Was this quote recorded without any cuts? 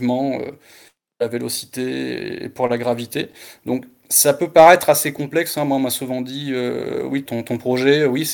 no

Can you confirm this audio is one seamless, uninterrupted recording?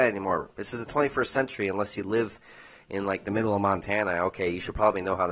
yes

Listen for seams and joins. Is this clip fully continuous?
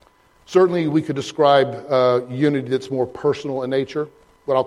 yes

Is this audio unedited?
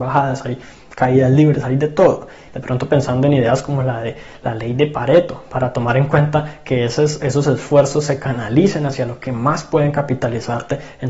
no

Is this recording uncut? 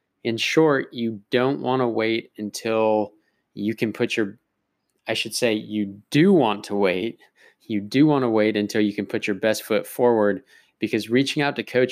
yes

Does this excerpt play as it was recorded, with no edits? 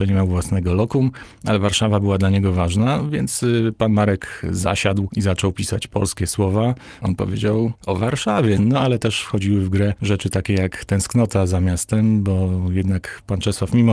no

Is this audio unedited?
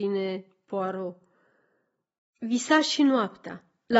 no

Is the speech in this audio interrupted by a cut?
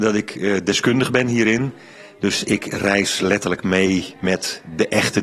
no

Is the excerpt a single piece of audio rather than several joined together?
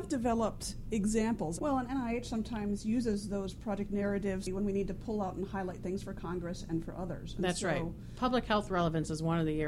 no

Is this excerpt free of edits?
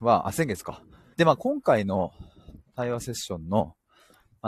no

